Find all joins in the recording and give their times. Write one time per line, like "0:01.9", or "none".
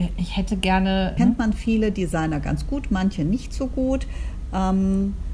0:01.2